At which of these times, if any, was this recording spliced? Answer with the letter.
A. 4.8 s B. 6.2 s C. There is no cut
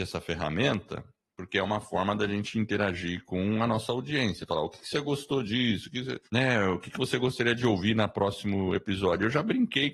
B